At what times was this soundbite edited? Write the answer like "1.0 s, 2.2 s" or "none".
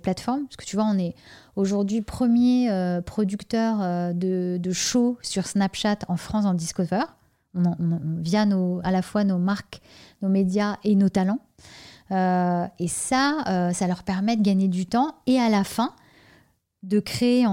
none